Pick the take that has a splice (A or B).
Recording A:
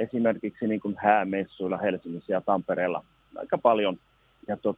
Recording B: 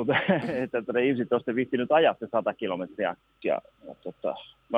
B